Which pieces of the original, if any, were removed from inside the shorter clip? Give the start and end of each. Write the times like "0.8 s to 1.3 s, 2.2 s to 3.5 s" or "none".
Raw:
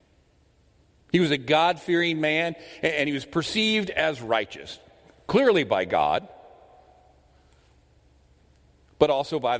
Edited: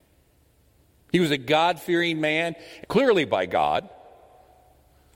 2.8 s to 5.2 s